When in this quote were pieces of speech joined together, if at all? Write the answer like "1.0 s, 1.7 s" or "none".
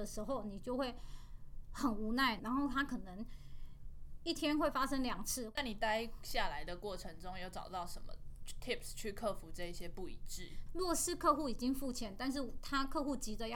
2.4 s, 10.7 s